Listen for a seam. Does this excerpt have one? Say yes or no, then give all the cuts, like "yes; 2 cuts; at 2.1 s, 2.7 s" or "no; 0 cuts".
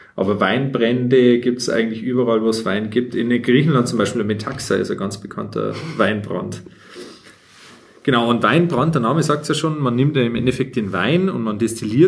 no; 0 cuts